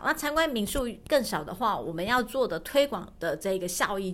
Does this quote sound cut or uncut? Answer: uncut